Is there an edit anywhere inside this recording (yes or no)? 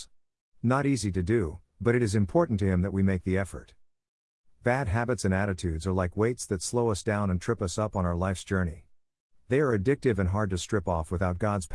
no